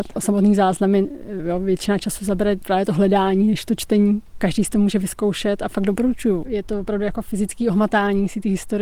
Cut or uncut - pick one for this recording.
cut